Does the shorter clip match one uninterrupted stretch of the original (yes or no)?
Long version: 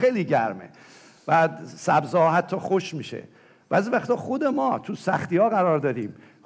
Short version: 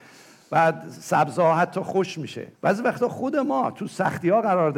no